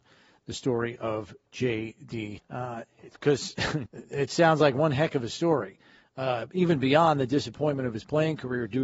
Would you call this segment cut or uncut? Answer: cut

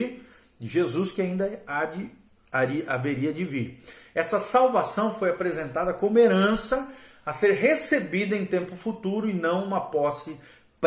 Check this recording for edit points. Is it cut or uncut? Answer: uncut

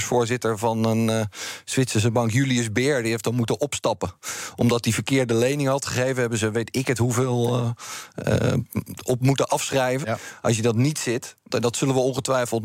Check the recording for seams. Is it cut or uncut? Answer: cut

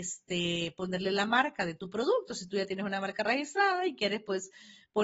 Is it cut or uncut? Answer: uncut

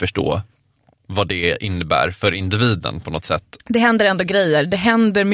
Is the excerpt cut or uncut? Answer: cut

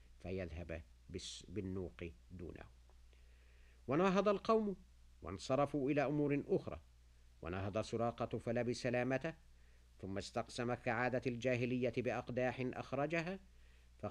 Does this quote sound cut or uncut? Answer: uncut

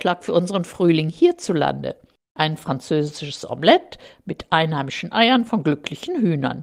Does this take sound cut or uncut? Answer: uncut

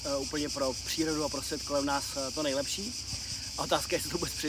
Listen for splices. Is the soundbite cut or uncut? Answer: uncut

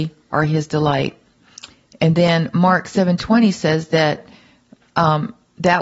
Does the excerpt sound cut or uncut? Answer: uncut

